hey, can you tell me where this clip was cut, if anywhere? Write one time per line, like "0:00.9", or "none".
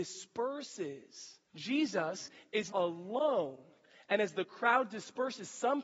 0:01.5
0:02.7